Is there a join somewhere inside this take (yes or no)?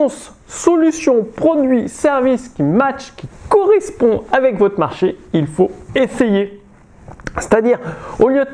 no